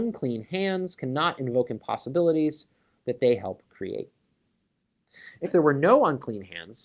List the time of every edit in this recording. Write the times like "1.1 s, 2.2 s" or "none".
5.4 s